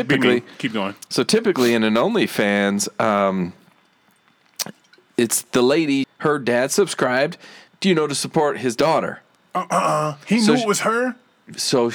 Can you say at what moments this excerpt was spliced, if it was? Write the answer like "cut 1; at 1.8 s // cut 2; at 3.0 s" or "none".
cut 1; at 6.0 s